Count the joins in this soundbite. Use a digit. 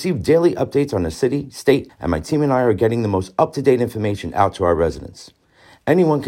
1